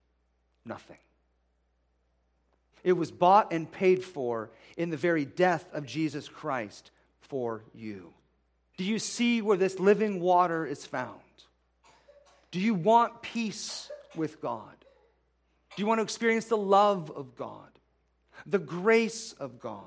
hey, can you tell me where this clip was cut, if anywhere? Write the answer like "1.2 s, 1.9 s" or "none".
2.7 s, 8.7 s